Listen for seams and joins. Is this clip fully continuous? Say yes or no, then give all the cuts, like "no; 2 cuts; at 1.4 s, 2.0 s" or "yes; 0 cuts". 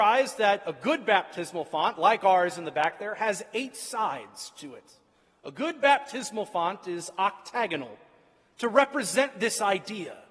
yes; 0 cuts